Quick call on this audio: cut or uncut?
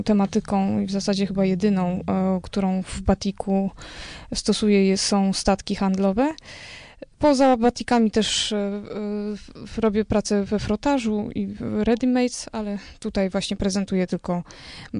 uncut